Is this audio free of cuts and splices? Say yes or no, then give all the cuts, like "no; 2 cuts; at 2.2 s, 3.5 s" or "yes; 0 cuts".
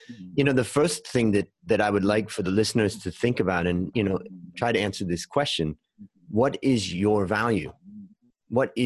yes; 0 cuts